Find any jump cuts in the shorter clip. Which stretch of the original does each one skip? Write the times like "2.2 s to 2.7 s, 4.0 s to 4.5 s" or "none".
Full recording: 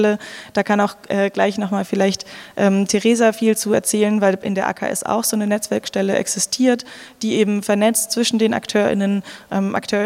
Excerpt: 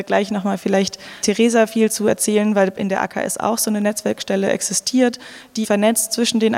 2.5 s to 2.9 s, 7.3 s to 7.6 s